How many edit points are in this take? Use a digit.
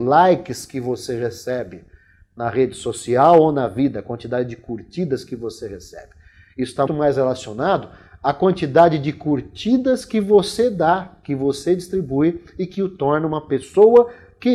1